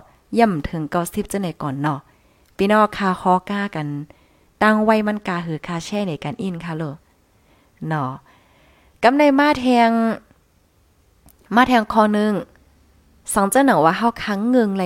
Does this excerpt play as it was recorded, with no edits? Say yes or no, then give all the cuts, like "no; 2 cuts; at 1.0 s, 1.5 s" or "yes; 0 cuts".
yes; 0 cuts